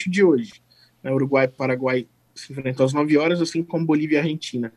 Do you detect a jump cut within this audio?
no; 0 cuts

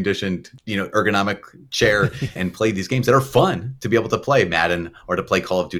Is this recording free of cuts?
no; 1 cut; at 2.4 s

